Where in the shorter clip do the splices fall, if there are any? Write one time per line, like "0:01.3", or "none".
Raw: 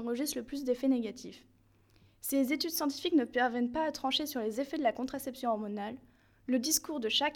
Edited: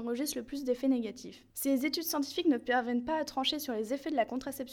0:01.5